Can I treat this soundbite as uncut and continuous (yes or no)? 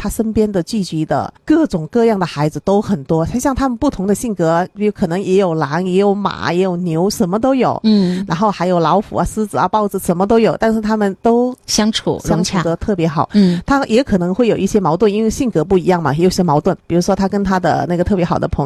yes